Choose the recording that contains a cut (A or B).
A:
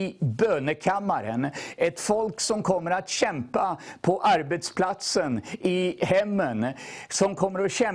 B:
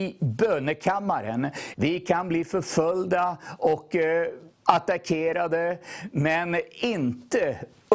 B